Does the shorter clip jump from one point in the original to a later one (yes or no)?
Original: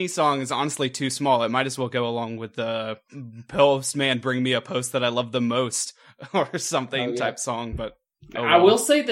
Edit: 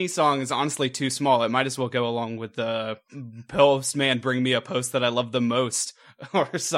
no